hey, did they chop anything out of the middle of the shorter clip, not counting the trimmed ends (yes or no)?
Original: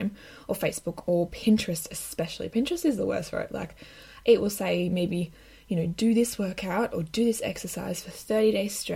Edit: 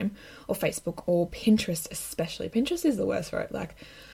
no